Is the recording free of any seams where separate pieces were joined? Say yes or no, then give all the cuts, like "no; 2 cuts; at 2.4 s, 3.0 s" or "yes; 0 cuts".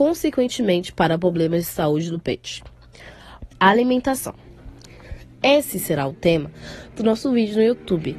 no; 1 cut; at 3.5 s